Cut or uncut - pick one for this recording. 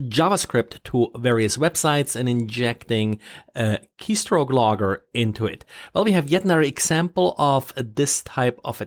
uncut